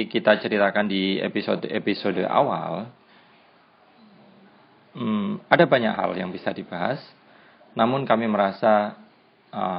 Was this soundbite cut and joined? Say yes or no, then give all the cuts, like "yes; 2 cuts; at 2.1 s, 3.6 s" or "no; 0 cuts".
no; 0 cuts